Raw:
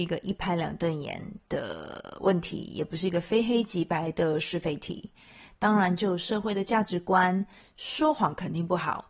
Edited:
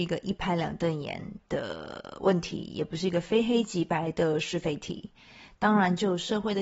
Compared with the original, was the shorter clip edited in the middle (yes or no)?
no